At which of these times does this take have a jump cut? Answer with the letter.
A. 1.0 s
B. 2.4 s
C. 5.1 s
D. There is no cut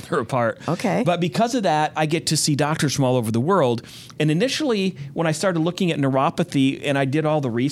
D